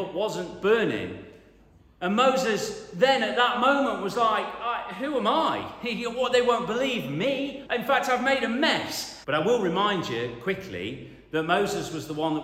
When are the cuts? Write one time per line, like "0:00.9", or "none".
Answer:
0:07.7
0:09.2